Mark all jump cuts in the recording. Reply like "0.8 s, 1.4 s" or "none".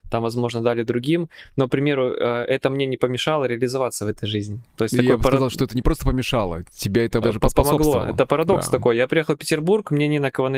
7.2 s